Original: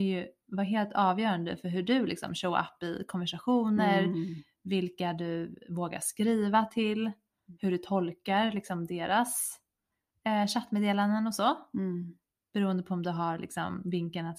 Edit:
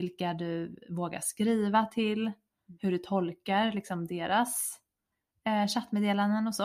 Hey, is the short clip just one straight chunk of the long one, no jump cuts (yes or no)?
yes